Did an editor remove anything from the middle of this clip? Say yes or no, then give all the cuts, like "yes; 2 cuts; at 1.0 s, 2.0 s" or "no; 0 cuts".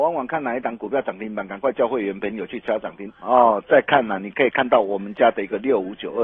yes; 1 cut; at 3.1 s